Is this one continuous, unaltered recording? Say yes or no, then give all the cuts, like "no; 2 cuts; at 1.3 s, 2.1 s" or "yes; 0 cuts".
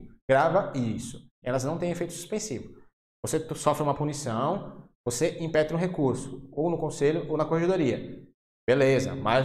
no; 1 cut; at 1.4 s